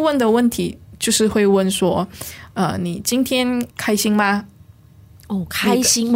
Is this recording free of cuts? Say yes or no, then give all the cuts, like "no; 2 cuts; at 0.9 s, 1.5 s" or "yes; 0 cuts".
no; 1 cut; at 3.7 s